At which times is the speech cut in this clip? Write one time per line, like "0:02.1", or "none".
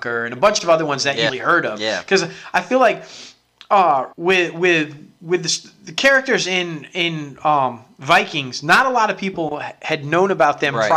0:01.3
0:04.1